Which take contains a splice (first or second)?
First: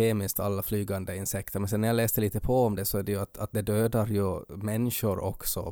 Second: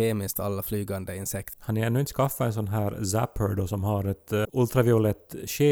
second